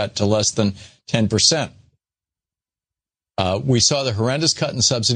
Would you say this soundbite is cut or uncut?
uncut